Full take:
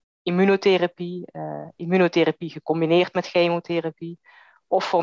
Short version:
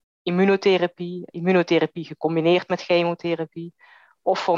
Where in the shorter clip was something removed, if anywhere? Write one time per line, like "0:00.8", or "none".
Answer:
0:01.3